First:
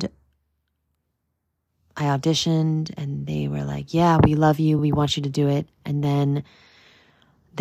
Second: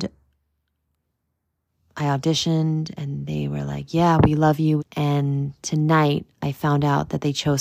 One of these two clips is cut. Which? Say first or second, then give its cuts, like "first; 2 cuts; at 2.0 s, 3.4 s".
second; 1 cut; at 4.8 s